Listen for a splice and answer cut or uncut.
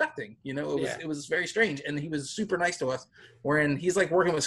uncut